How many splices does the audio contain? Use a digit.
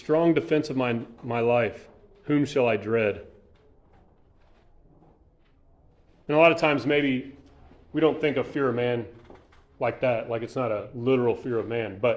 0